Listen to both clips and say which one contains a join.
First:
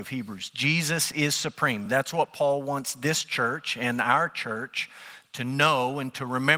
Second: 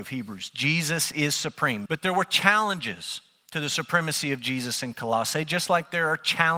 second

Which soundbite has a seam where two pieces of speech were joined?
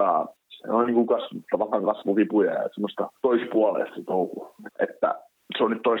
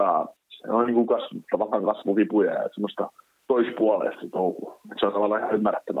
first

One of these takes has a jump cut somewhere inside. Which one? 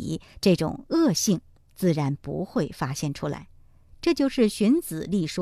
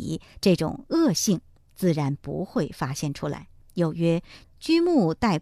second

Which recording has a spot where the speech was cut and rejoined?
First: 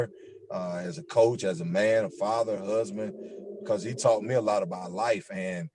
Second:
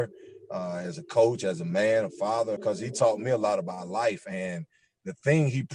second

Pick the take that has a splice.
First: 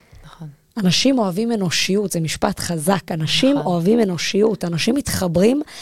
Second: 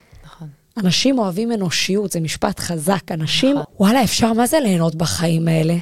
second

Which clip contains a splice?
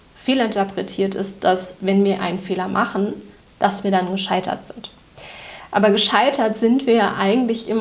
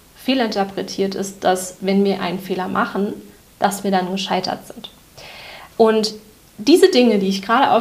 second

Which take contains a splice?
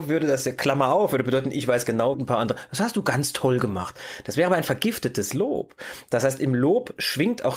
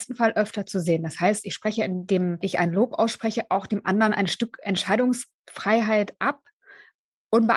first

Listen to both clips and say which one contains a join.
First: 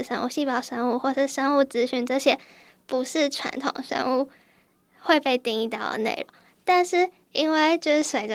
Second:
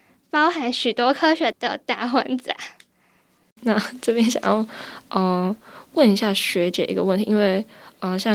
second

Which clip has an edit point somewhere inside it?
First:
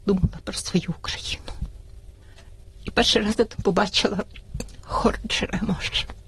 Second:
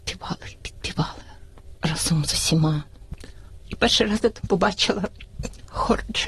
second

